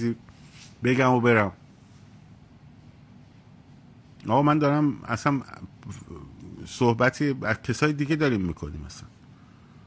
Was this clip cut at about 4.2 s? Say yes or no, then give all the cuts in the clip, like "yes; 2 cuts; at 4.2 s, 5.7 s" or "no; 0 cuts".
no; 0 cuts